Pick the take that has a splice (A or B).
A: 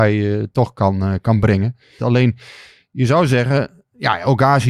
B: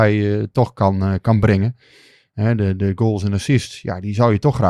A